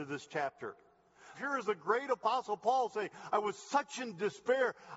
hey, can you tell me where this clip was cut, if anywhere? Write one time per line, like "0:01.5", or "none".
0:01.3
0:03.3